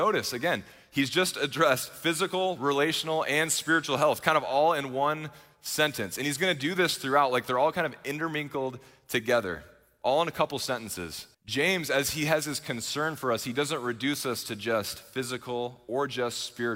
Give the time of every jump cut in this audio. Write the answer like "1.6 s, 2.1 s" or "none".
11.3 s